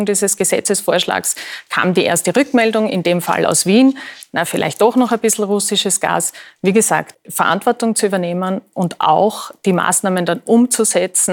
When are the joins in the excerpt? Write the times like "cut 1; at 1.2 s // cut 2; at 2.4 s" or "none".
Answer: cut 1; at 4.5 s // cut 2; at 7.1 s